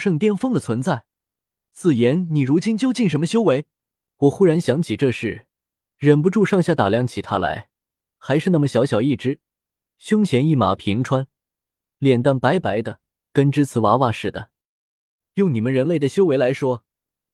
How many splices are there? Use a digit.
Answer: 2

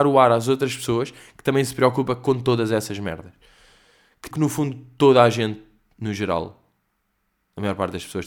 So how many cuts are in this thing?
1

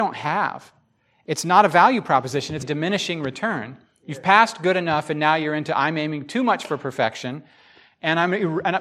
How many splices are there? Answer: 1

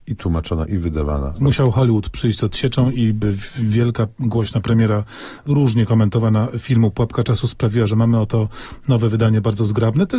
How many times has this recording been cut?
1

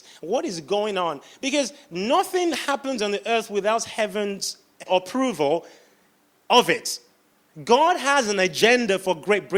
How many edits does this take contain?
1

